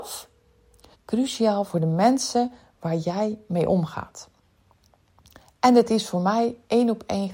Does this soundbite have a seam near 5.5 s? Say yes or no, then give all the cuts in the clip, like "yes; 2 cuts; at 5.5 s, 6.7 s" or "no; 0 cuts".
no; 1 cut; at 0.9 s